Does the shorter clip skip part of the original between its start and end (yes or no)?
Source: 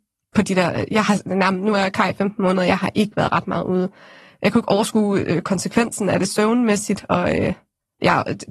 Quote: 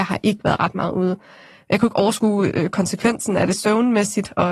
no